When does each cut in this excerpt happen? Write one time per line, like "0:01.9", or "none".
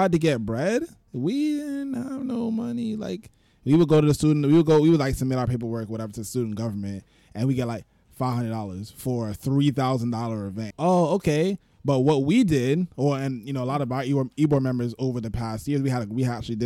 0:10.7